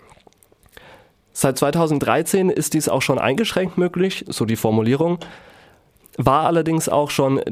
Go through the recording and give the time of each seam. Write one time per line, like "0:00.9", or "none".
0:04.3